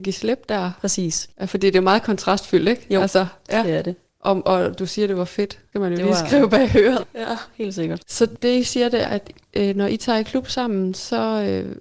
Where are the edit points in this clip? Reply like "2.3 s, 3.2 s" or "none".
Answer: 7.0 s, 9.0 s